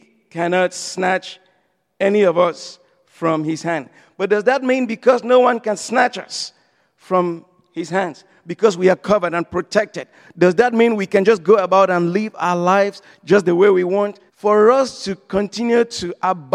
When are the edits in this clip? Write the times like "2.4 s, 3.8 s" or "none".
14.3 s